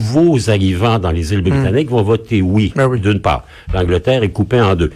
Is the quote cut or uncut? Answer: uncut